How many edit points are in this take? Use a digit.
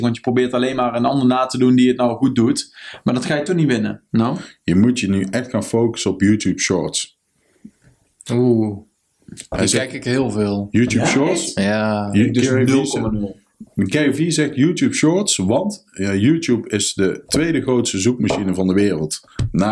1